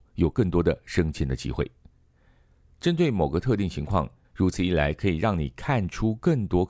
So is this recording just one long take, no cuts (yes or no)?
no